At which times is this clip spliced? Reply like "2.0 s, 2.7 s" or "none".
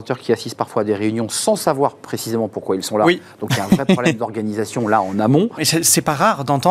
5.6 s